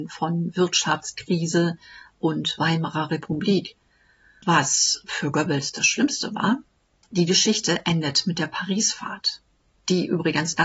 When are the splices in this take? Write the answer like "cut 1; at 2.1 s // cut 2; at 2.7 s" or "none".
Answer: none

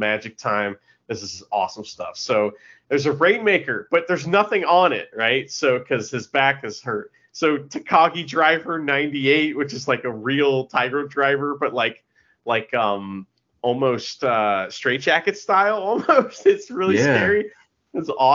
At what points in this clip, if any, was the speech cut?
cut 1; at 5.1 s

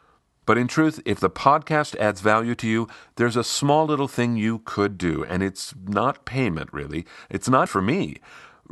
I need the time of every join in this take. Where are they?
cut 1; at 7.7 s

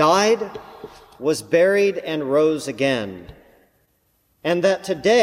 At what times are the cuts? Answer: none

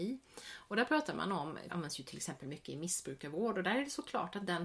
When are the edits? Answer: cut 1; at 1.7 s

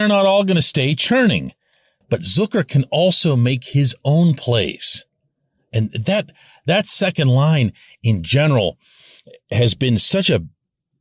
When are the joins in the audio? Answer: cut 1; at 2.0 s

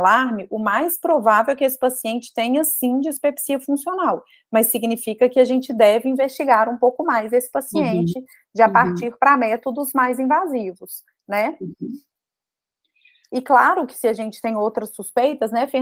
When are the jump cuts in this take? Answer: none

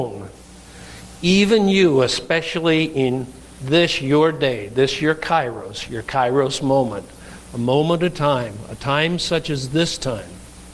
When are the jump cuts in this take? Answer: none

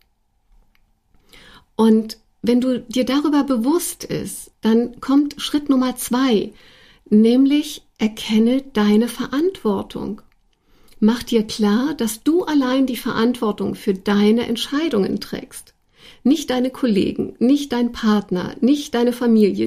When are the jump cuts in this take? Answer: cut 1; at 4.5 s

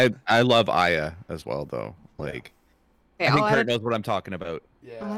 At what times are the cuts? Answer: cut 1; at 3.2 s

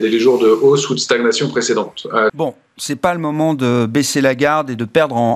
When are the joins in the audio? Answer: cut 1; at 2.3 s

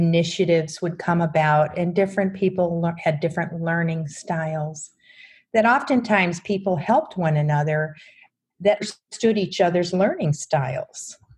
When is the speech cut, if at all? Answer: none

